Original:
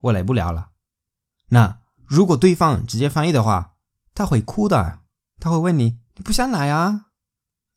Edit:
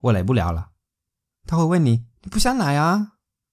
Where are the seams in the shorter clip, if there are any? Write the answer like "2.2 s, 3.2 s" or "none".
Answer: 1.3 s